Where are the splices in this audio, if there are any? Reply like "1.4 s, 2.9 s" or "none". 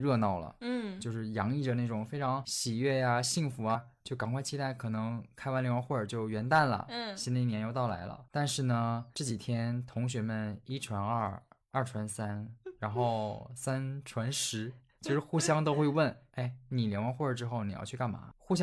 3.7 s

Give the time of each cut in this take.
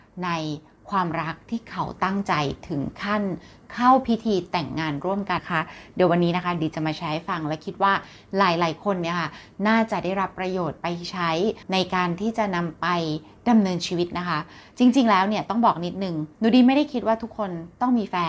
5.4 s, 11.6 s

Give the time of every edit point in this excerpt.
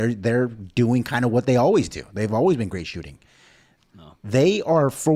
3.8 s

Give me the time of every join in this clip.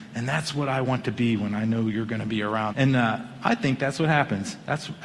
2.7 s

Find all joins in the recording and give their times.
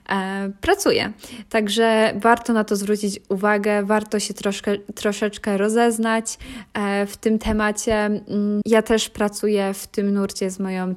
8.6 s

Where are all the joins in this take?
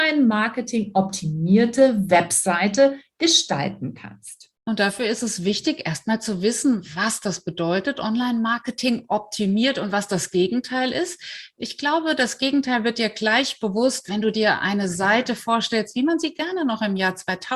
none

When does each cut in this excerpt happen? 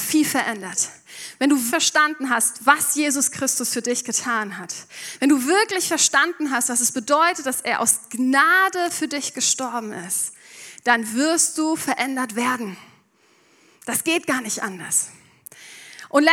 1.7 s

